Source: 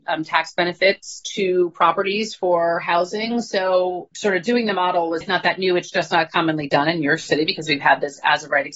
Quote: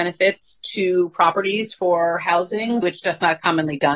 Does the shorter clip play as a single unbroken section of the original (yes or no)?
no